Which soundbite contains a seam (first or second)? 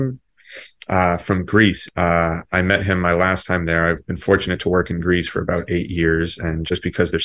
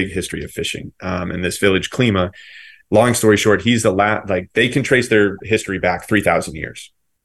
first